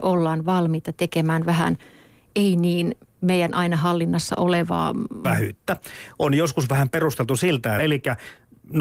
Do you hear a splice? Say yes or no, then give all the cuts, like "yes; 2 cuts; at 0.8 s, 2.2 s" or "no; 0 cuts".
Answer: yes; 2 cuts; at 5.2 s, 7.8 s